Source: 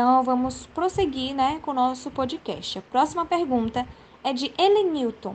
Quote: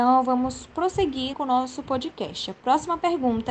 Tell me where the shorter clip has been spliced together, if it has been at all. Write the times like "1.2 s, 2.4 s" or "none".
1.3 s

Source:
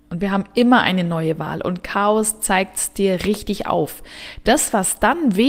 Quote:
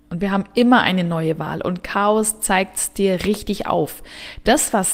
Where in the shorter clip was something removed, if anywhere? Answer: none

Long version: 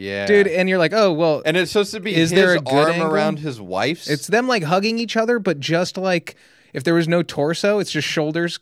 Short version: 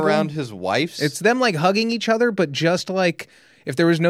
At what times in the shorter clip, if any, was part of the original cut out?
none

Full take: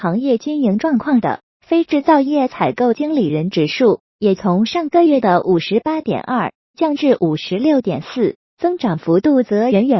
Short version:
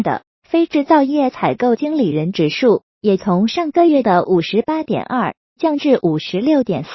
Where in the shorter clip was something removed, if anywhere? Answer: none

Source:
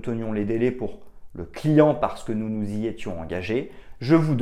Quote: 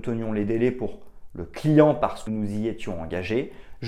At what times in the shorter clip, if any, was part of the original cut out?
2.3 s

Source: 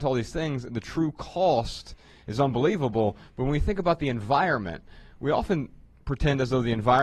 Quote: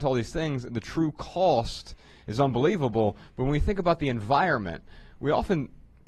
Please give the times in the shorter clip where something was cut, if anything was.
none

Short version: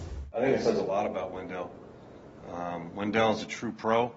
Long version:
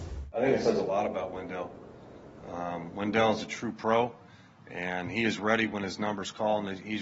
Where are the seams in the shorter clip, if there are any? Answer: none

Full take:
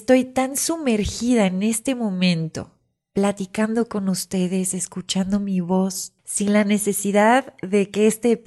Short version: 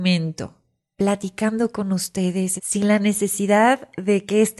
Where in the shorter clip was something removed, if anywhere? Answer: 2.6 s

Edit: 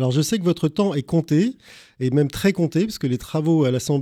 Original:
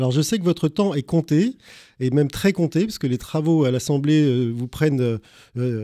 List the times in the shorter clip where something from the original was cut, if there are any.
none

